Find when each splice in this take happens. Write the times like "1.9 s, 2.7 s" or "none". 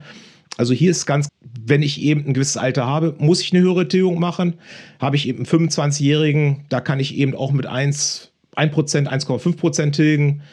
1.3 s